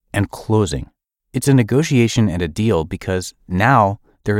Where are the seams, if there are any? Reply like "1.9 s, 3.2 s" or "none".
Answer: 1.2 s